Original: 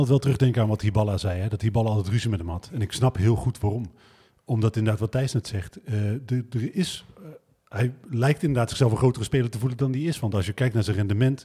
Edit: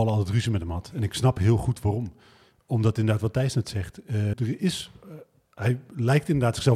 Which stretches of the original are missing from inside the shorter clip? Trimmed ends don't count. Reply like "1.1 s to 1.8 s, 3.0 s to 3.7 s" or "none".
6.1 s to 6.5 s